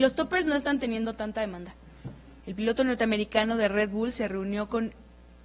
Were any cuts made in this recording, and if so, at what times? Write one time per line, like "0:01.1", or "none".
0:02.4